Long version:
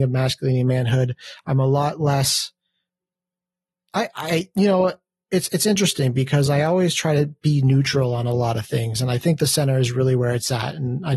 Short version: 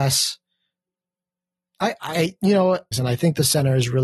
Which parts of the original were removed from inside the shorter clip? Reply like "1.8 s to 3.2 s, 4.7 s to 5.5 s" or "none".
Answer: 5.1 s to 8.9 s